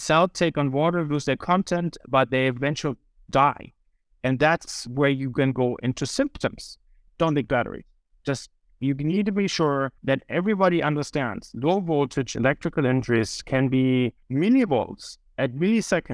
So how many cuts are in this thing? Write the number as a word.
three